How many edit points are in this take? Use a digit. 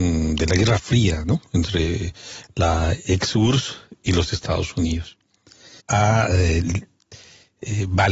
1